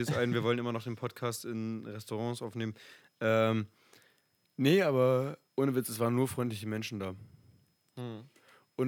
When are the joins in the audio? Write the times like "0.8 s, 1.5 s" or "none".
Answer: 5.5 s